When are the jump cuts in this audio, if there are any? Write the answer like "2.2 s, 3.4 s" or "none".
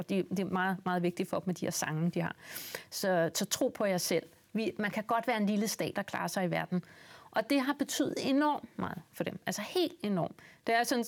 2.9 s